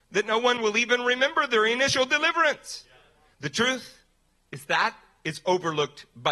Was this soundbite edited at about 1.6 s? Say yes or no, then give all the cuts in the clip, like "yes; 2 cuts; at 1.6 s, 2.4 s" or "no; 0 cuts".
no; 2 cuts; at 3.3 s, 4.7 s